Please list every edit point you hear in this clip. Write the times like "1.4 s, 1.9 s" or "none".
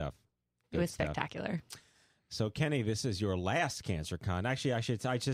none